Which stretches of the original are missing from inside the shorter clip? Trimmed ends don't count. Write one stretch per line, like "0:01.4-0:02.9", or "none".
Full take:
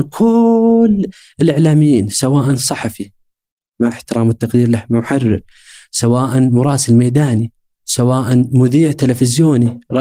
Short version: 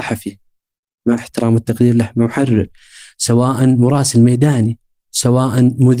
none